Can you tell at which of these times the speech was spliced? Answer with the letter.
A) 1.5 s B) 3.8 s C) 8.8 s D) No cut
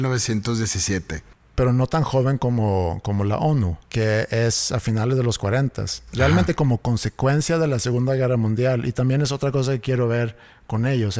B